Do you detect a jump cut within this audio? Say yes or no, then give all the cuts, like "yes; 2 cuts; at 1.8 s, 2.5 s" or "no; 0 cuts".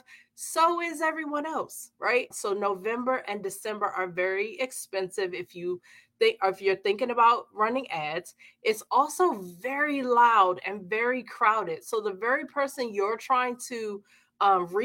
yes; 1 cut; at 2.3 s